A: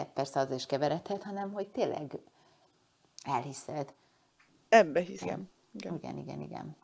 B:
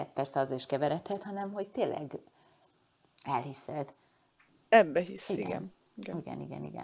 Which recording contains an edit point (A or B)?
A